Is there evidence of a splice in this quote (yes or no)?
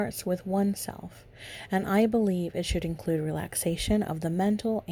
no